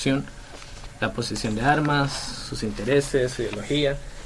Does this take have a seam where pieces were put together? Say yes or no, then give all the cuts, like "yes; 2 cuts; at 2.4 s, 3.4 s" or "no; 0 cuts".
no; 0 cuts